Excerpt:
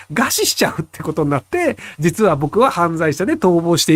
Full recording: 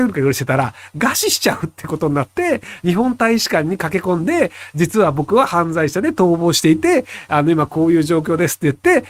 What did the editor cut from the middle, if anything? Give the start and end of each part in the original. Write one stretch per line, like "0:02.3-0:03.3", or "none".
0:02.8-0:04.7